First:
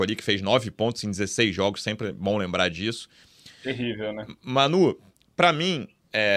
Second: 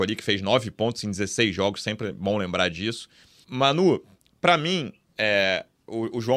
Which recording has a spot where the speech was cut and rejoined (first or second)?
second